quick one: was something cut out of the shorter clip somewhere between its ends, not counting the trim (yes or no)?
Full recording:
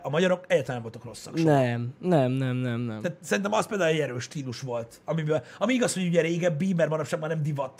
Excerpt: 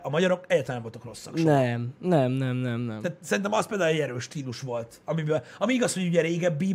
no